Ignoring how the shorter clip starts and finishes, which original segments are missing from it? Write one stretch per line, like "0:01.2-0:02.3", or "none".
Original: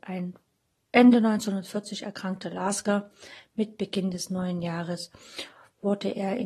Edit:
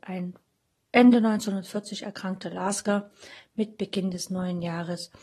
none